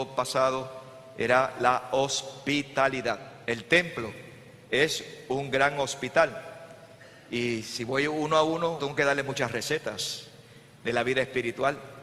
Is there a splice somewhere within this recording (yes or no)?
yes